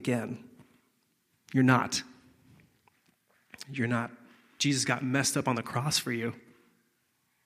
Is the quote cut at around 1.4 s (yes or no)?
no